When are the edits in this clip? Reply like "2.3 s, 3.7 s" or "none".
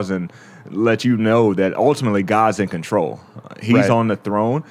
none

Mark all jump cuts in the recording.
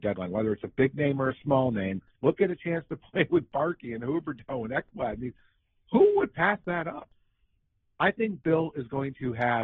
2.2 s

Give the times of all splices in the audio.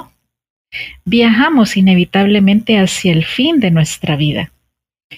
none

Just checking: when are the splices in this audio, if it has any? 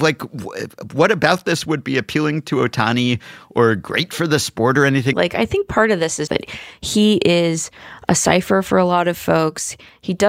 5.1 s, 6.3 s

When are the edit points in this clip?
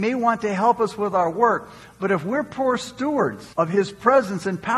3.5 s

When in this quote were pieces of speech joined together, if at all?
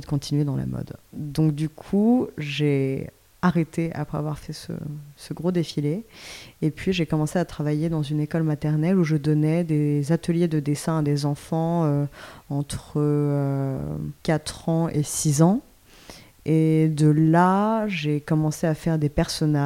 14.2 s

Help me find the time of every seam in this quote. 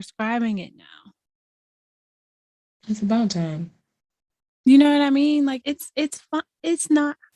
5.6 s

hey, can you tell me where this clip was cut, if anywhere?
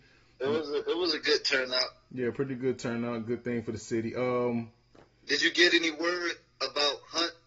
none

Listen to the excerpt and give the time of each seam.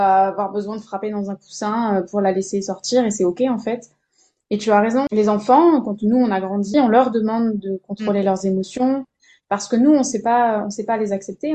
6.7 s

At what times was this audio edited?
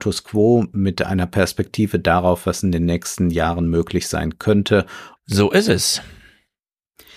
5.2 s

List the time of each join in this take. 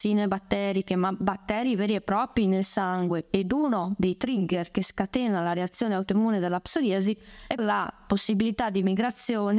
7.6 s

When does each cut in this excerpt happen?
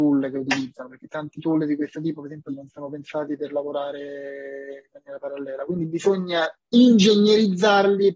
2.5 s

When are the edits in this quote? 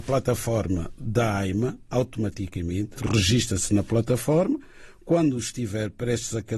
3.0 s

